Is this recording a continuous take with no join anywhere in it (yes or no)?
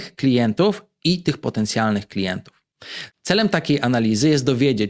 no